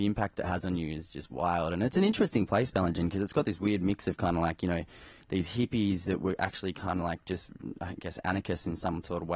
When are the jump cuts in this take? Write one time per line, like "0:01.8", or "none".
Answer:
none

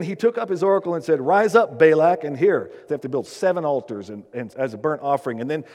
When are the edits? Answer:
0:02.9
0:04.5

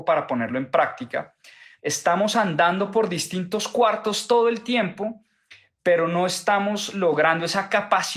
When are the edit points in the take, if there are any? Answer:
0:01.8

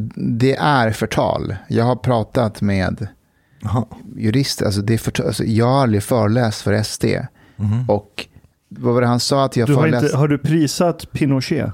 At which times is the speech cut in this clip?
none

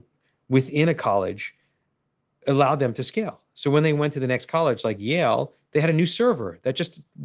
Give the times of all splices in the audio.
none

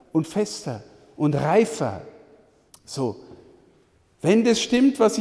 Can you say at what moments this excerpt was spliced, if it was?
0:02.7

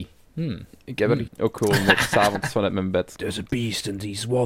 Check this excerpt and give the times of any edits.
0:01.3
0:03.2

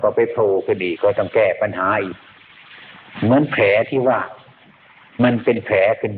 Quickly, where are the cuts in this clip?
0:01.0

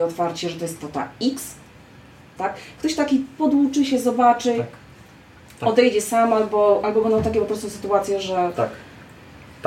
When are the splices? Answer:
0:02.4

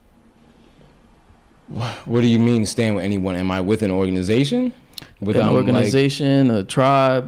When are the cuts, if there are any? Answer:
none

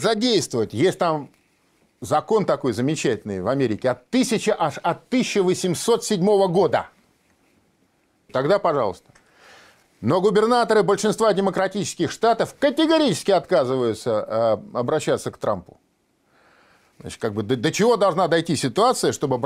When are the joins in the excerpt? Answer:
0:08.3
0:16.9

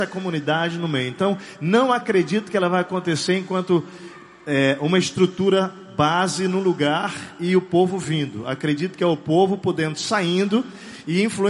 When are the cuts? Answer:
none

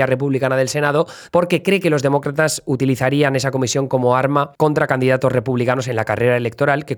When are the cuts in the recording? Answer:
0:01.3
0:04.5

